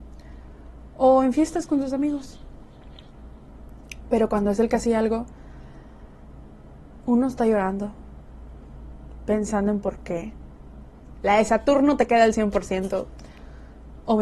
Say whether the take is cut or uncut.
cut